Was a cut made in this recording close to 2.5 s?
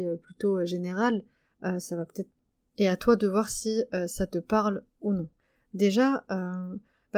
no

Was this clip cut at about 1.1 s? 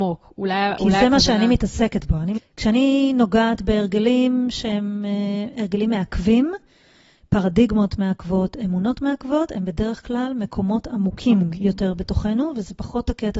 no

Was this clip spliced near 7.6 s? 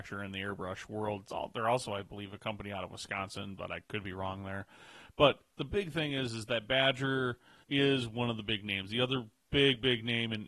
yes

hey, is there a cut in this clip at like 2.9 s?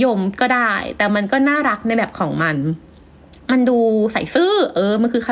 no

